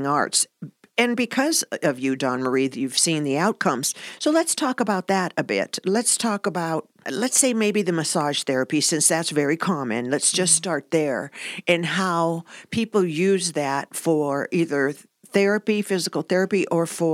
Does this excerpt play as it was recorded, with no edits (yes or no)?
no